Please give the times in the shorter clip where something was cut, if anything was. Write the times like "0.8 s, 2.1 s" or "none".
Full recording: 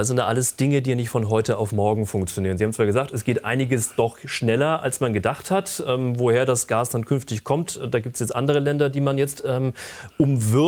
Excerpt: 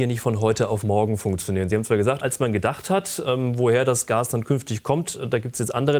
2.2 s